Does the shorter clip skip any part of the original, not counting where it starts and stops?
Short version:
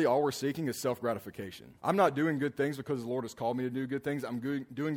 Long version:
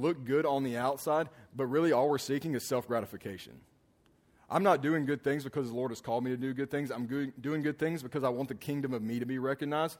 yes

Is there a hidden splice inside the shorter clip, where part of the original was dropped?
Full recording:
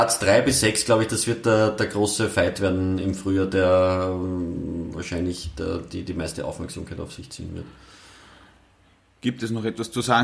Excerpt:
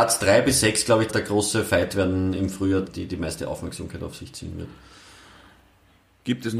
yes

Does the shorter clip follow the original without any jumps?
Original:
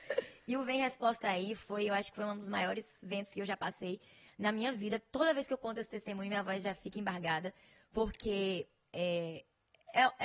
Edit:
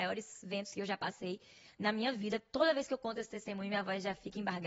yes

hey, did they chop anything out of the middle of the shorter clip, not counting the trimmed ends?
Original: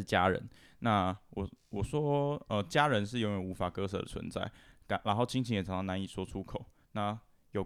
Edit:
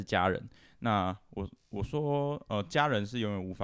no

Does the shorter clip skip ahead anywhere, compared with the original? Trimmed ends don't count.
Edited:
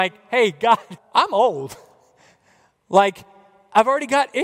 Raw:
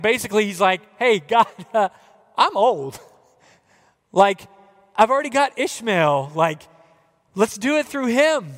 yes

